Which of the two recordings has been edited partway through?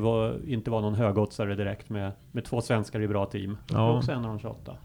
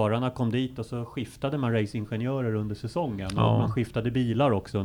first; 1 cut; at 3.7 s

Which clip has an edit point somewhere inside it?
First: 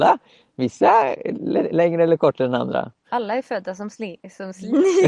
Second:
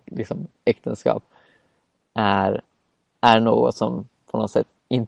first; 1 cut; at 3.0 s

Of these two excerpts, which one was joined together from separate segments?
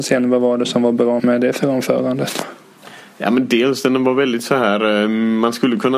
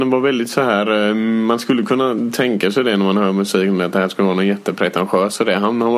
first; 1 cut; at 1.2 s

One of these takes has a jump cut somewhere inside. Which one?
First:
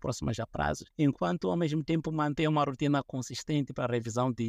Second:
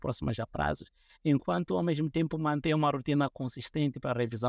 first; 1 cut; at 0.9 s

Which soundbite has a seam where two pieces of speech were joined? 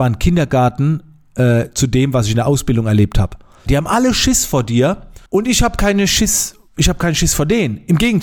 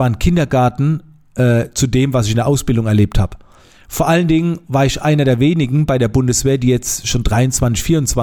first; 2 cuts; at 3.7 s, 5.3 s

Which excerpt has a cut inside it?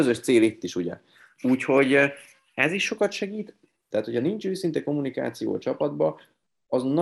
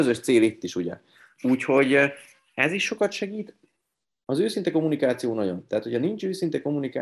first; 1 cut; at 3.9 s

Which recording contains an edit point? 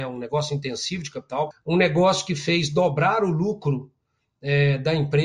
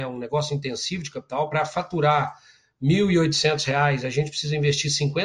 first; 1 cut; at 1.5 s

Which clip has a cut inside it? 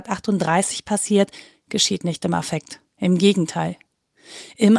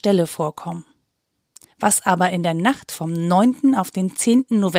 first; 1 cut; at 2.9 s

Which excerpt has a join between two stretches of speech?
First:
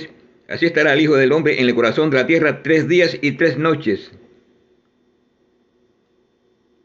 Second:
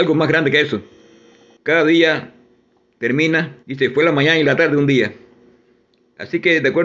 second; 2 cuts; at 1.6 s, 3.6 s

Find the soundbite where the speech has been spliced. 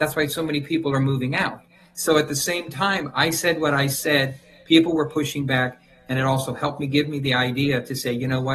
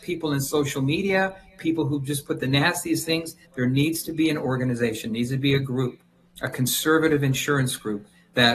second; 1 cut; at 3.4 s

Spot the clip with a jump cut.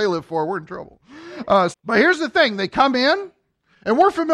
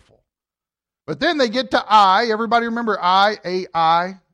first; 1 cut; at 1.7 s

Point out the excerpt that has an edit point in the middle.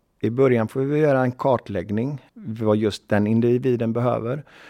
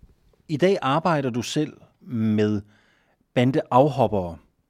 first; 1 cut; at 2.3 s

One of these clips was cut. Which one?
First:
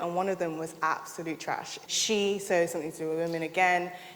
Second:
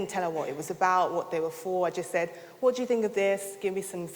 first; 1 cut; at 1.9 s

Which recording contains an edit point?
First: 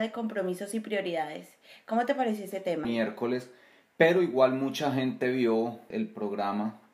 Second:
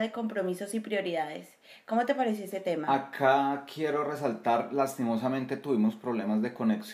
first; 2 cuts; at 2.8 s, 5.9 s

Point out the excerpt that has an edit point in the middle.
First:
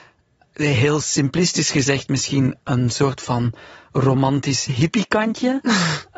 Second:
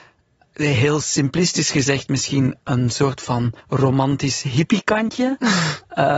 second; 1 cut; at 3.6 s

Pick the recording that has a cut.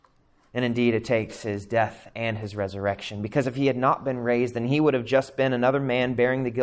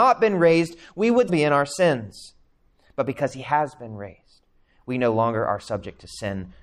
second; 1 cut; at 1.3 s

